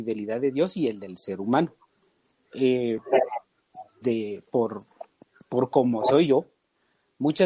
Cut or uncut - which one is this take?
cut